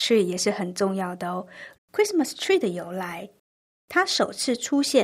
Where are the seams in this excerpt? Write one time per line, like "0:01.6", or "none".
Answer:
0:01.7